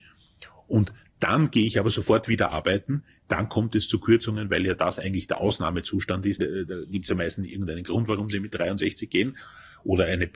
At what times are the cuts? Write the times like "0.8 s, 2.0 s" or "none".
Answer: 6.4 s